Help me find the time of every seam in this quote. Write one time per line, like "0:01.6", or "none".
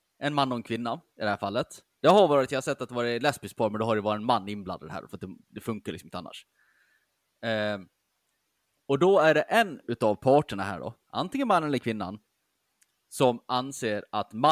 none